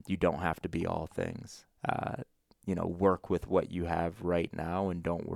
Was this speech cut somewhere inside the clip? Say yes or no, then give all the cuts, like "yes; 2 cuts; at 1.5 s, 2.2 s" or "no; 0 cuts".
yes; 1 cut; at 1.7 s